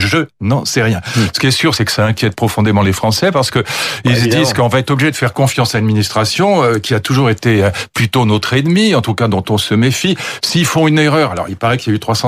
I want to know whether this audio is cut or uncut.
uncut